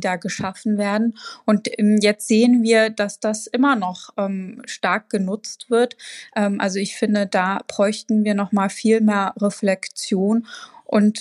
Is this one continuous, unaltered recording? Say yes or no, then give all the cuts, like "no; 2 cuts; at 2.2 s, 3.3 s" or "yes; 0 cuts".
yes; 0 cuts